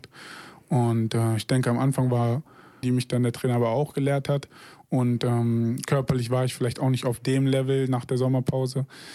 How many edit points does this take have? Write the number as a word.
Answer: one